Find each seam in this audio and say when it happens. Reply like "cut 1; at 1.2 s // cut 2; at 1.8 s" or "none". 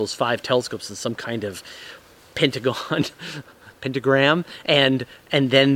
none